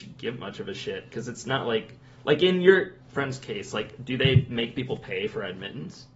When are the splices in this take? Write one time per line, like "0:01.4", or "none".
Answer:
0:03.0

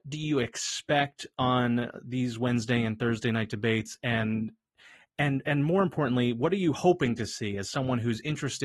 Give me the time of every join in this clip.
none

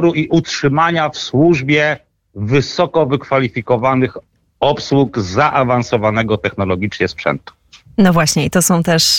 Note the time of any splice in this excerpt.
none

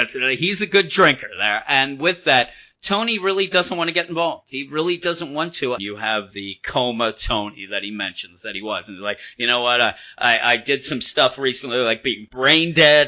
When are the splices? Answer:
0:05.8

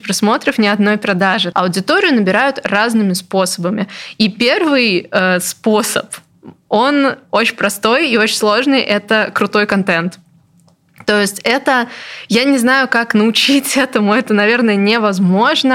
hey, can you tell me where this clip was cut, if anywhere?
0:01.5

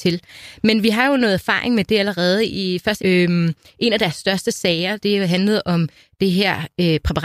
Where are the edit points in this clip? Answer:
0:03.0
0:05.0

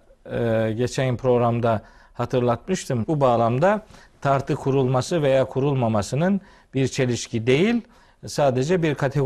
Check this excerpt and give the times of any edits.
0:03.0

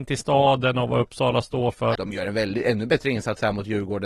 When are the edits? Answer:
0:02.0

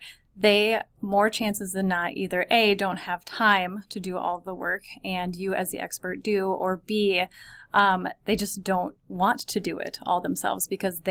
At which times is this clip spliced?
none

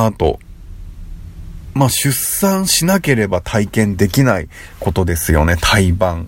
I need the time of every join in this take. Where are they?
none

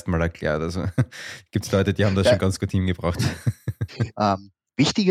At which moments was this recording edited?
0:04.1

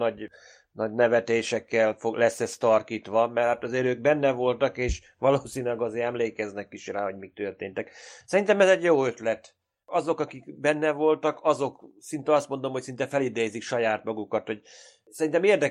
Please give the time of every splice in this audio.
none

